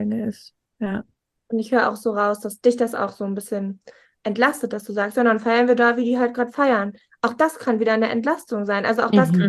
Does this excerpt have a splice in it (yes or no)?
no